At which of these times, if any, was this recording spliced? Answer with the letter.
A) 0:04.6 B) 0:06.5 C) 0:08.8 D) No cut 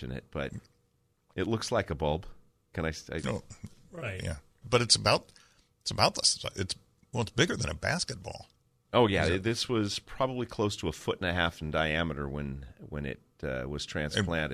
A